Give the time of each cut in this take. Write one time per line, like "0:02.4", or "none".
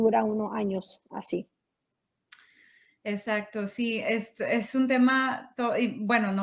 none